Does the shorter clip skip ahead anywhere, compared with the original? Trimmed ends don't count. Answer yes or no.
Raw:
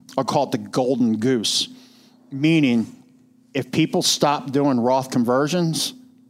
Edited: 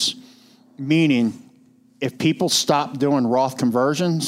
no